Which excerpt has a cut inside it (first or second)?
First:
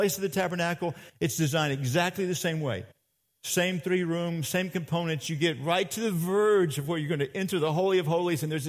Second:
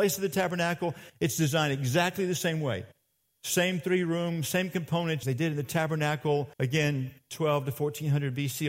second